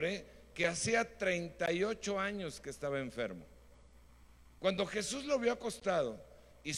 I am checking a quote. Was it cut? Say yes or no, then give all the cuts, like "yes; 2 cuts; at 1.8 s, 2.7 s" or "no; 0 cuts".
no; 0 cuts